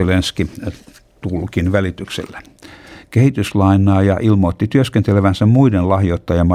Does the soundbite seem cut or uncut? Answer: cut